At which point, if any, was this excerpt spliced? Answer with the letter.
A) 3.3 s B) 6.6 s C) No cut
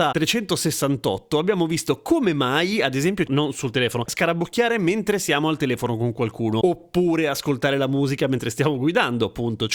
A